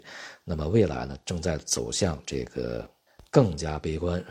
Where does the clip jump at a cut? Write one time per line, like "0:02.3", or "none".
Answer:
none